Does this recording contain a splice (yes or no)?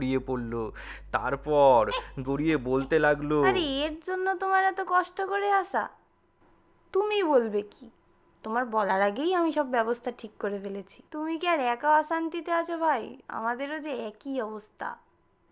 yes